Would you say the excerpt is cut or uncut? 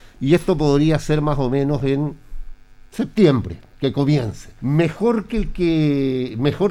cut